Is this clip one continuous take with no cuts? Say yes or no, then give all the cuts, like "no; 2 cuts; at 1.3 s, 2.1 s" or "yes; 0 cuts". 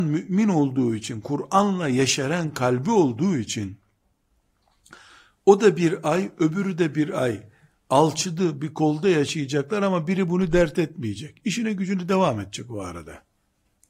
yes; 0 cuts